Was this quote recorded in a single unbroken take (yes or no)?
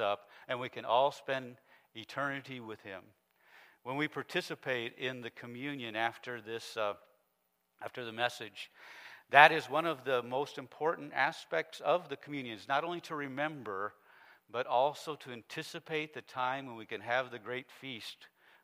yes